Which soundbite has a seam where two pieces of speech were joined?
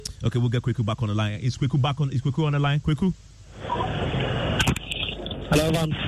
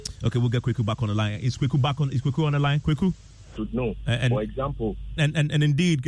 second; 2 cuts; at 3.6 s, 5.2 s

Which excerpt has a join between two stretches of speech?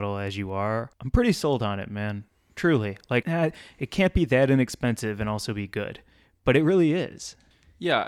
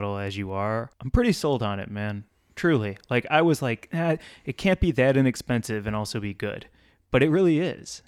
first; 1 cut; at 3.2 s

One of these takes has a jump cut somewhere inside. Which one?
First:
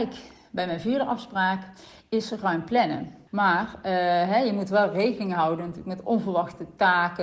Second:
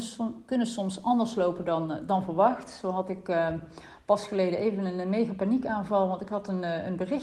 first; 1 cut; at 3.3 s

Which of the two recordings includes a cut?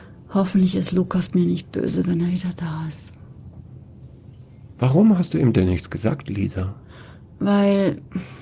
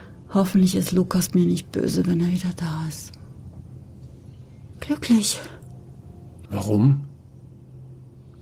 second; 2 cuts; at 4.7 s, 6.5 s

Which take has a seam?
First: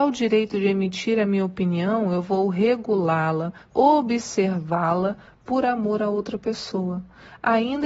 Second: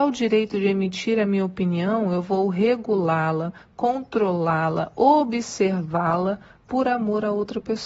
first; 1 cut; at 3.7 s

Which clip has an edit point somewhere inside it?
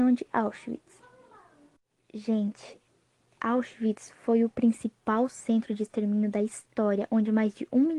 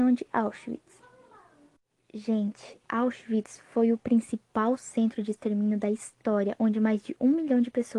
second; 1 cut; at 2.8 s

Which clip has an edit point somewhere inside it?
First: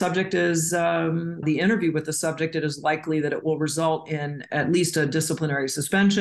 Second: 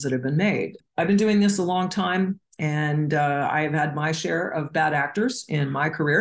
first; 1 cut; at 1.4 s

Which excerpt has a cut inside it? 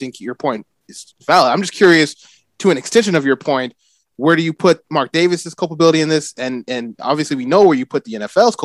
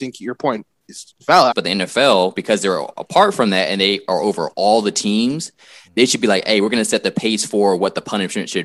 second; 1 cut; at 1.5 s

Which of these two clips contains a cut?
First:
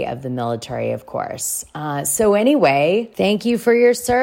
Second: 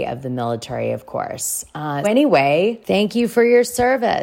second; 1 cut; at 2.0 s

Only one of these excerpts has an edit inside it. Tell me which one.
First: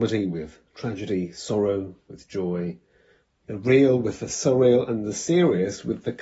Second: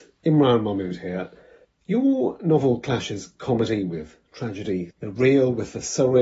second; 2 cuts; at 1.6 s, 4.9 s

